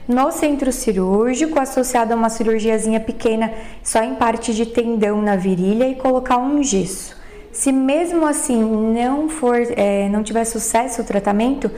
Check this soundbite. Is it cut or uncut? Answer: uncut